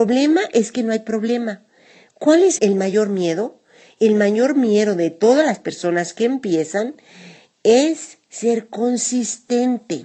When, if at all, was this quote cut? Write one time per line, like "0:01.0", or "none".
0:02.6